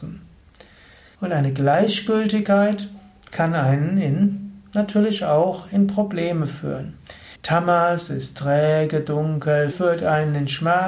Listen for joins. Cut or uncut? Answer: cut